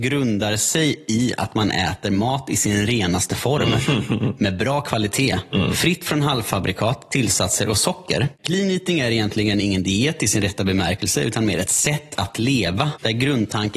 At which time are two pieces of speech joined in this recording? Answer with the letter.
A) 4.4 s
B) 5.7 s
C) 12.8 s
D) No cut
D